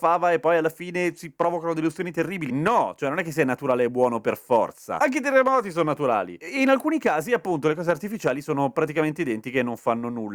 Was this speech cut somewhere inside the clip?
no; 0 cuts

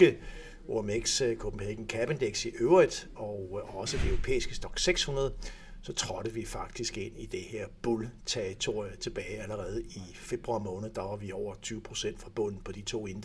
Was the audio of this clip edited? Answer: yes; 1 cut; at 3.1 s

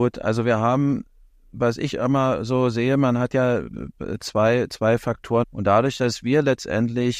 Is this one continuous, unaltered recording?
no; 1 cut; at 5.4 s

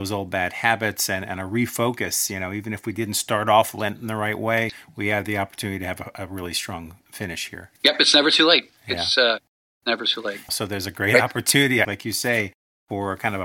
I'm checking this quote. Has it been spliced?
yes; 3 cuts; at 7.8 s, 10.5 s, 11.8 s

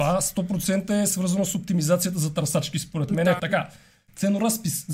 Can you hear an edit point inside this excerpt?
yes; 1 cut; at 3.4 s

